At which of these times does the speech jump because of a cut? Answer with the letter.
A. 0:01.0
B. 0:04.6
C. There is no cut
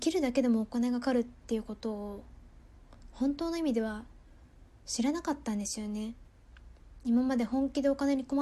A